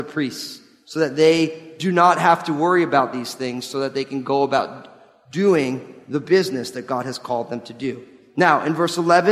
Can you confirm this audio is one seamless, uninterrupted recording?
yes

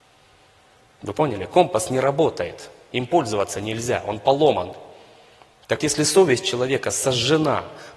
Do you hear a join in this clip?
yes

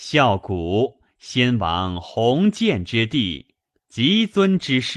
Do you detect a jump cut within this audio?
yes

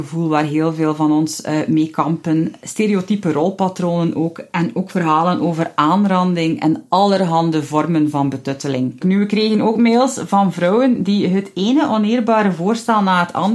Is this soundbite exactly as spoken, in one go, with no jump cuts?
no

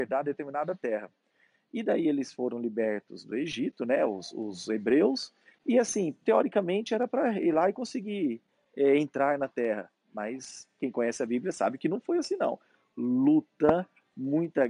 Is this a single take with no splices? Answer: yes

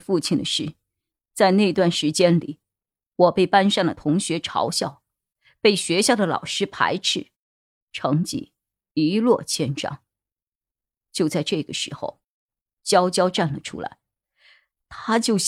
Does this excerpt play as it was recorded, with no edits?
yes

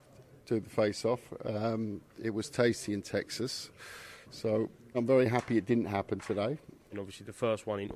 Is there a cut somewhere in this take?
yes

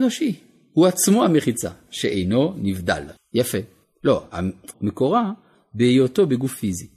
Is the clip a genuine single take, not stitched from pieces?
no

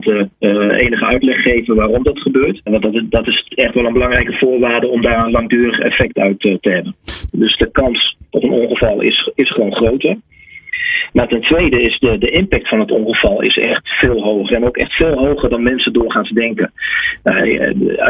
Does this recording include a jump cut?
yes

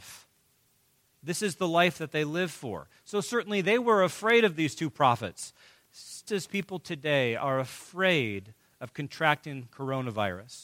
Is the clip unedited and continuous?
no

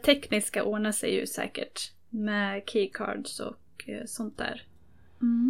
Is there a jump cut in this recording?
no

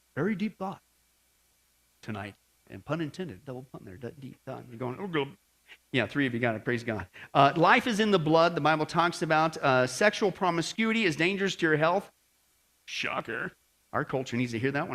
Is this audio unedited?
yes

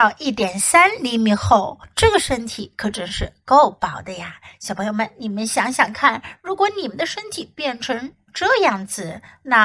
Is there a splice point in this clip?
no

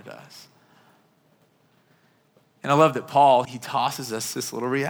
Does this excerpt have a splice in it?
yes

